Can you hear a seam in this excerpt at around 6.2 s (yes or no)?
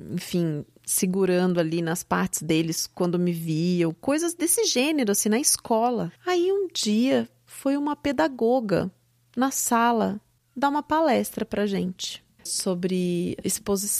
yes